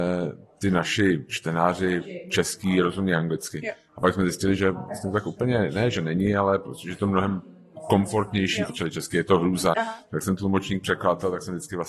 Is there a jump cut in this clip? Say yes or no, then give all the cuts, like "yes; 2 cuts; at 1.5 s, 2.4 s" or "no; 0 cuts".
yes; 2 cuts; at 8.7 s, 9.7 s